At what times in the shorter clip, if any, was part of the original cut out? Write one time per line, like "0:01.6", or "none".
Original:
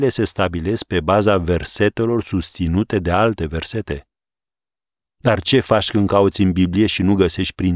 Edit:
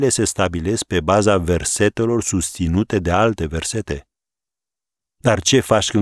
none